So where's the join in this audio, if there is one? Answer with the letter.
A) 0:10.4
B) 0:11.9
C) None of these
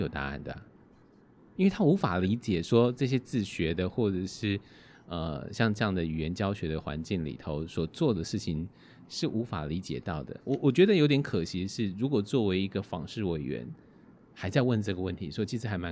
C